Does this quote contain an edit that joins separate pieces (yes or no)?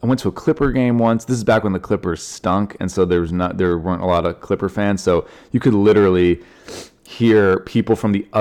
no